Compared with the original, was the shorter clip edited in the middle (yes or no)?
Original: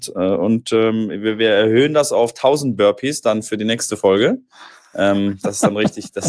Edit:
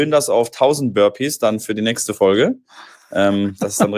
no